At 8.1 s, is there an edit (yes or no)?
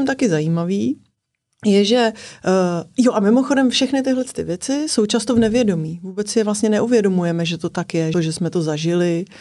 yes